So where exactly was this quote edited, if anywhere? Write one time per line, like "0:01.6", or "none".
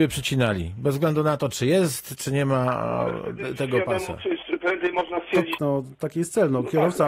0:05.6